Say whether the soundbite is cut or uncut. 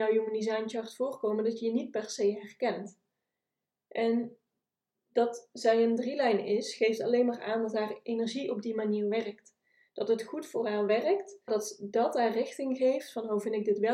cut